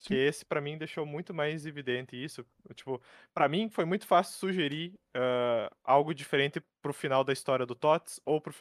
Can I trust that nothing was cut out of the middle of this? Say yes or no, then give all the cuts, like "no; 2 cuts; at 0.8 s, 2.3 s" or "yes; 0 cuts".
yes; 0 cuts